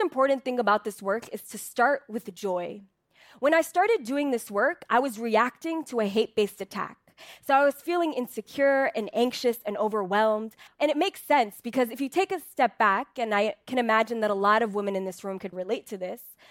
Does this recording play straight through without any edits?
no; 2 cuts; at 10.7 s, 15.5 s

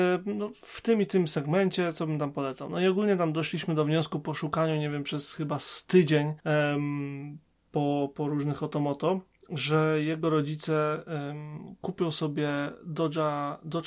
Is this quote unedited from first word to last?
no; 1 cut; at 6.4 s

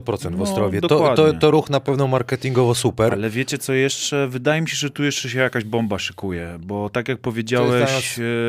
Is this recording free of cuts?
yes; 0 cuts

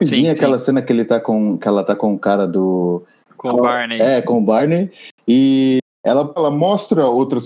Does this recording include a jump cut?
yes; 2 cuts; at 3.2 s, 6.4 s

